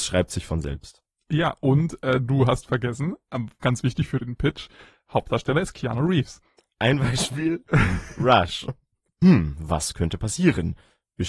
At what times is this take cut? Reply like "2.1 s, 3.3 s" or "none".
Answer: 6.7 s, 9.1 s